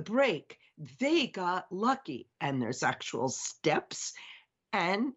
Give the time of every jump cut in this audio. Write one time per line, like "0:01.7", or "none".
0:02.4